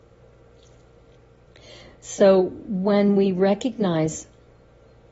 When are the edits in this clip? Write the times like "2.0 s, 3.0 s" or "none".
none